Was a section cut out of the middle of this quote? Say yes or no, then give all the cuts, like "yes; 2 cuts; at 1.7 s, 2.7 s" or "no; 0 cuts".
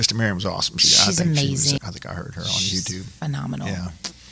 yes; 1 cut; at 1.8 s